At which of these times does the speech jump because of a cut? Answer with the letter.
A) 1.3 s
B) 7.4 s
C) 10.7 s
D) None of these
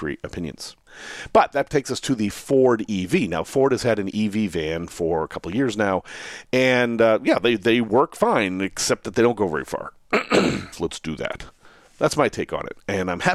C